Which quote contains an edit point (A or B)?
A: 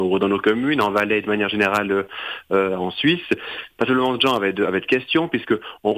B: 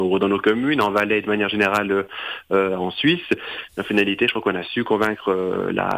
B